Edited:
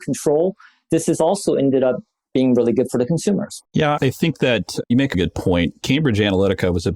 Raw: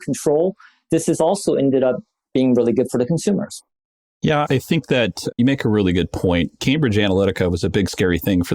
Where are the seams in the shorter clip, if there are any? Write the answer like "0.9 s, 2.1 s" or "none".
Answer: 3.6 s, 5.1 s